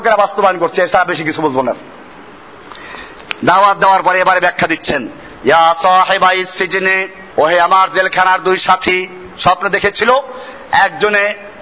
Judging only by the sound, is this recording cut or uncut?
cut